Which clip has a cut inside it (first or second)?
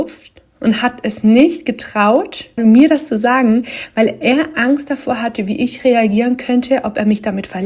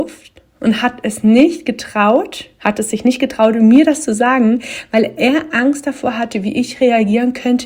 first